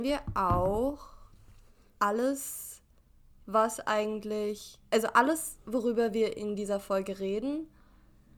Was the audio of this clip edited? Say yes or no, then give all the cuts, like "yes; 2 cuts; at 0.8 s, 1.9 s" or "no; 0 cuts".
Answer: no; 0 cuts